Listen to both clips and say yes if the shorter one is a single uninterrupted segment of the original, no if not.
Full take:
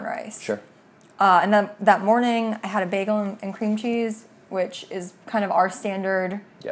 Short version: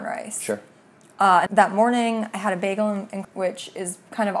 no